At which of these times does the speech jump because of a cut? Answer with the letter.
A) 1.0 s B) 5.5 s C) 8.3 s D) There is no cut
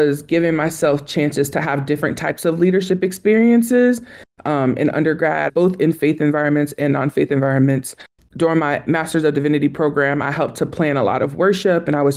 B